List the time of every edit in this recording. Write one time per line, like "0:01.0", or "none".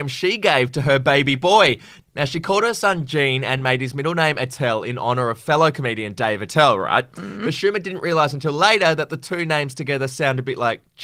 none